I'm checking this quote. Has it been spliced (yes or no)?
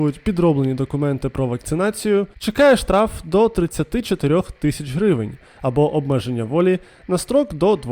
yes